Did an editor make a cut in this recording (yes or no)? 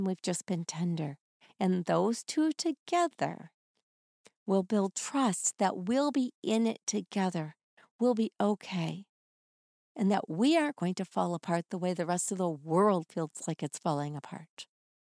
no